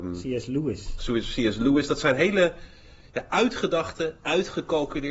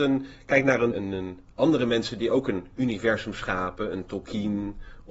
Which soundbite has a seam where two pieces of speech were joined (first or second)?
second